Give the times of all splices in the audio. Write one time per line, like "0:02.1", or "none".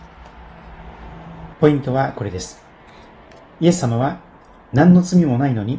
0:01.5